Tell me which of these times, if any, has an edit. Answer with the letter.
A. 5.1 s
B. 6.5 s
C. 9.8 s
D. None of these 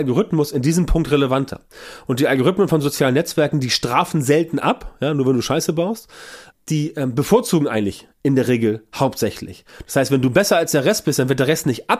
B